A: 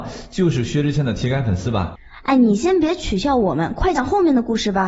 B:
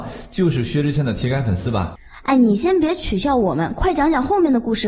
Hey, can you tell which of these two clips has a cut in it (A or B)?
A